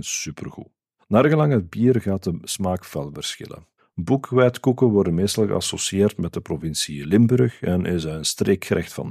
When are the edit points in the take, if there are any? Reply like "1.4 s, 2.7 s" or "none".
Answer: 1.0 s, 3.8 s